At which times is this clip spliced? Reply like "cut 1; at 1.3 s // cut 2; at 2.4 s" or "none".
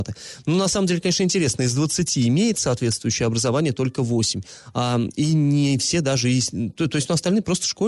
none